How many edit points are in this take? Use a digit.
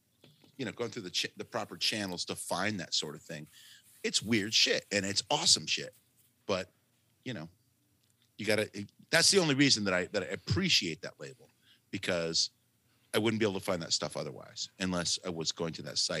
2